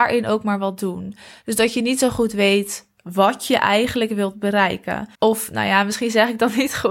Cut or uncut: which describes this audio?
cut